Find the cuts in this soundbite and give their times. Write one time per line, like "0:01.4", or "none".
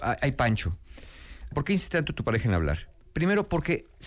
0:01.5